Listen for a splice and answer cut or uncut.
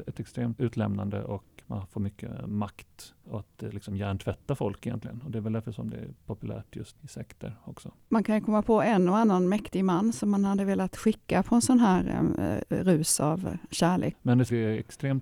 cut